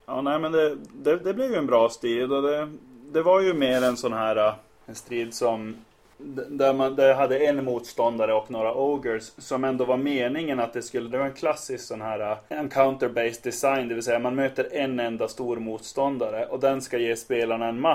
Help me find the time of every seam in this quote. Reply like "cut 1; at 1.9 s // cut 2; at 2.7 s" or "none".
cut 1; at 11.1 s